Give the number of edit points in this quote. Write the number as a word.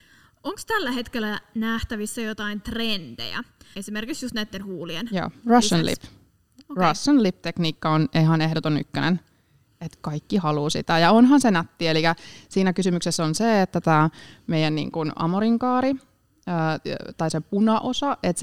one